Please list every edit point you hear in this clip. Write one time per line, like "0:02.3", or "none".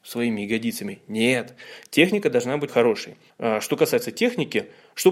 0:02.7